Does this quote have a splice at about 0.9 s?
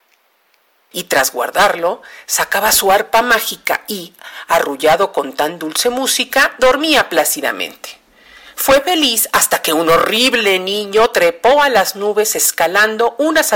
yes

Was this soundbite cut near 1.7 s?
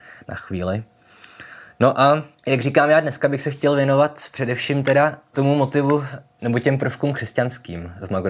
no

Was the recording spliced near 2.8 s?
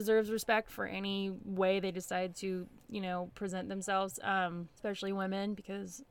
no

